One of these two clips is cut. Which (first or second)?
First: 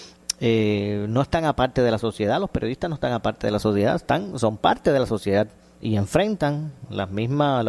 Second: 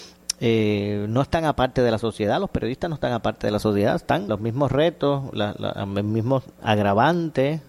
second